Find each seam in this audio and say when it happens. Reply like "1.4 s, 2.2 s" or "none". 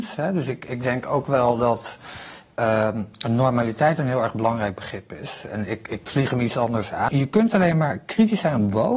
7.1 s